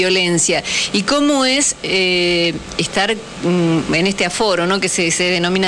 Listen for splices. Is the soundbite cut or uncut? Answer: uncut